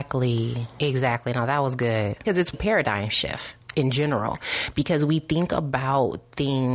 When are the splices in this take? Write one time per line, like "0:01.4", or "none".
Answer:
0:02.5